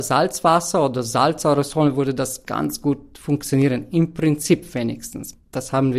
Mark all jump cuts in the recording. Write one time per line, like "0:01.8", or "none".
none